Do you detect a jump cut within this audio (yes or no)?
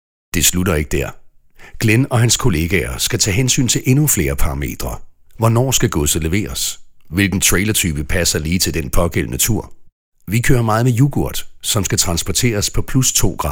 no